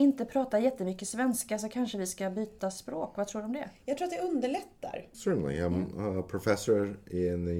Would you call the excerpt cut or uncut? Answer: cut